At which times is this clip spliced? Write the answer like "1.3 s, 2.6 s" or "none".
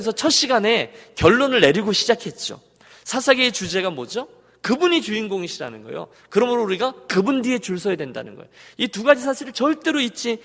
none